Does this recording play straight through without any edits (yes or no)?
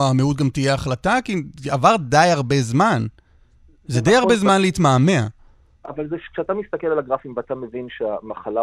yes